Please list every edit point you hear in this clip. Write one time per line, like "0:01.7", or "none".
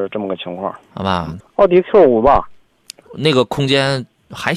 0:01.4